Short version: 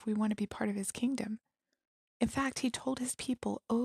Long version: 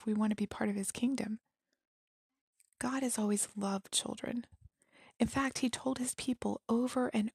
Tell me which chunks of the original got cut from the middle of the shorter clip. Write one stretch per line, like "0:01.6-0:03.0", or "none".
0:02.2-0:05.2

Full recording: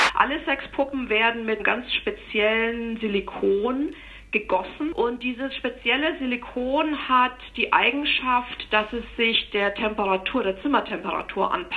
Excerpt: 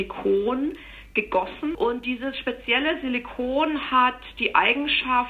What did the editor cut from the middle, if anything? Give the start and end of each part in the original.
none

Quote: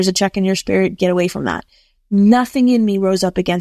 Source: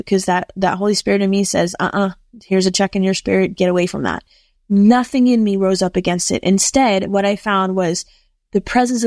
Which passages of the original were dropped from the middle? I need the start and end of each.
none

